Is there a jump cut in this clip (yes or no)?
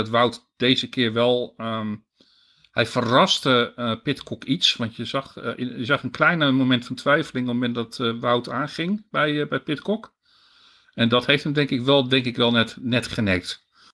no